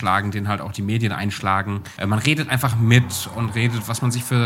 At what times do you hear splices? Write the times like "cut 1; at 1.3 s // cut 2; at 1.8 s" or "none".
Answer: cut 1; at 2.0 s